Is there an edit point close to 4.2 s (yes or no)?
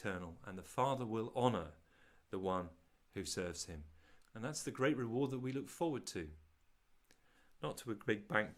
yes